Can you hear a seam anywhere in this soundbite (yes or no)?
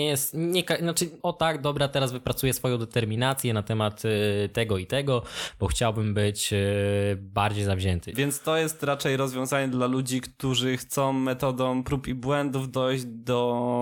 yes